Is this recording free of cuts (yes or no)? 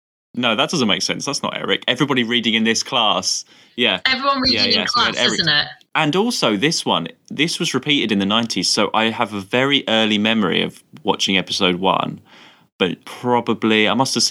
no